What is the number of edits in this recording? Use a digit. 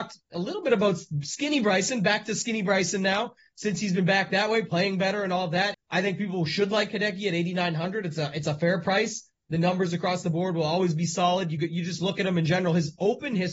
1